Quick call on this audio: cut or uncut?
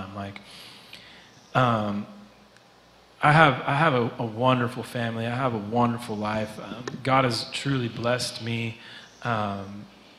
uncut